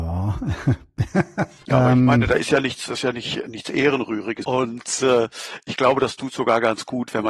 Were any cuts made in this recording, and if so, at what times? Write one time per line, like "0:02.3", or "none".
0:04.4